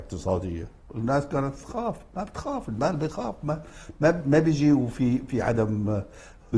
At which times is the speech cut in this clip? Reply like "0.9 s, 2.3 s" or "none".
none